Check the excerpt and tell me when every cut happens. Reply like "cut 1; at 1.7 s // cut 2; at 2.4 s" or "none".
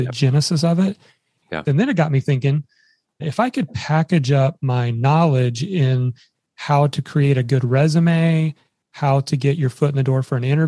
cut 1; at 1.6 s // cut 2; at 3.2 s